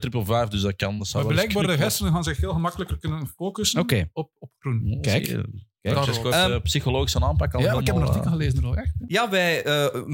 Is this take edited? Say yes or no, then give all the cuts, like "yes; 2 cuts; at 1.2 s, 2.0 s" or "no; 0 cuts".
no; 0 cuts